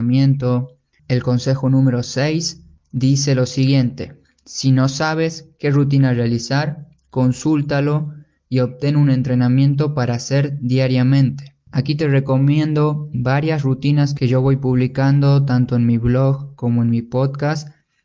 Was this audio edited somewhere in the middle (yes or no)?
yes